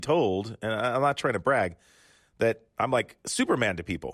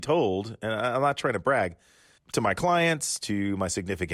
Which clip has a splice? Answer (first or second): second